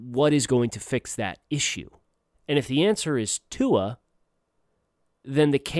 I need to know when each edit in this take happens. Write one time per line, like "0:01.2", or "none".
0:02.3